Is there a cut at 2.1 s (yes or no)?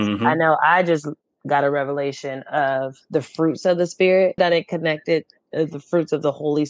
no